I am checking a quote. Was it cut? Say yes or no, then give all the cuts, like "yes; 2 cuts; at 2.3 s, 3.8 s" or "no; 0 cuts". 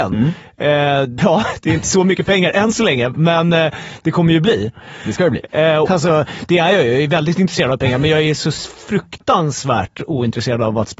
yes; 2 cuts; at 1.2 s, 5.9 s